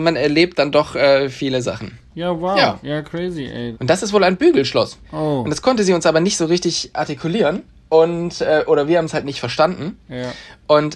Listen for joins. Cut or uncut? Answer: cut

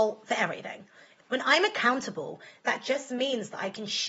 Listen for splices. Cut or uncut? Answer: cut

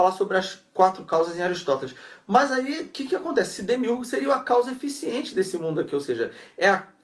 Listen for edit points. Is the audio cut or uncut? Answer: uncut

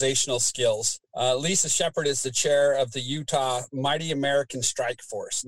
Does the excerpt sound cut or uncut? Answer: cut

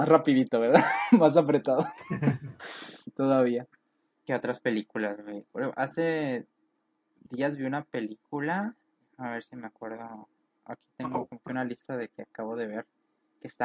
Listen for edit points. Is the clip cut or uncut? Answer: uncut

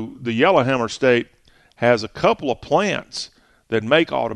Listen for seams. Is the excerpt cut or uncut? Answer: uncut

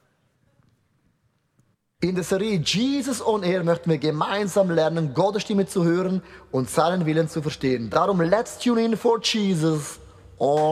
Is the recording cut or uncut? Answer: uncut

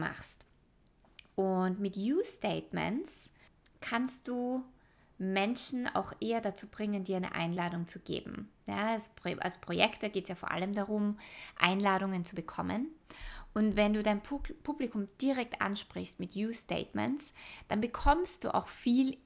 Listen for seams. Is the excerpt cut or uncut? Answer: uncut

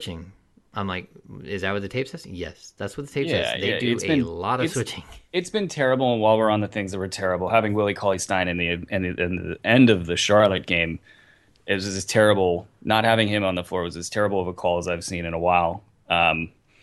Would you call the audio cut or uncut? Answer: uncut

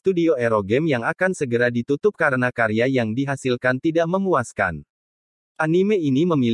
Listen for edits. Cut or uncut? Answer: cut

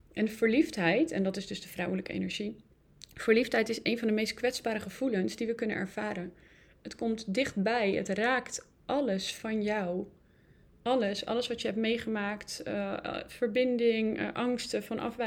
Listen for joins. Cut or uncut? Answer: uncut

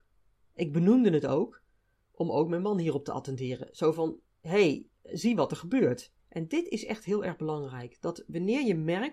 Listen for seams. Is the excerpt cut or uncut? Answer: cut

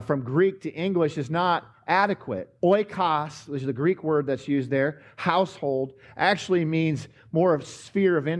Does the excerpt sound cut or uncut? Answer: cut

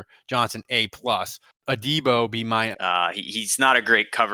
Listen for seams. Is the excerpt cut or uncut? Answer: cut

